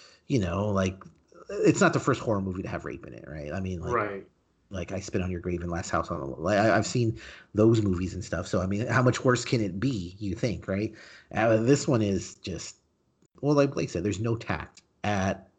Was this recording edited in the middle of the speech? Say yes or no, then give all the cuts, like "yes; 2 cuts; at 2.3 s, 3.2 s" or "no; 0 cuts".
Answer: no; 0 cuts